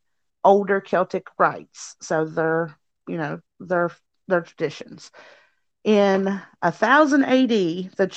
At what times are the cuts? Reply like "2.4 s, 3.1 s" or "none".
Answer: none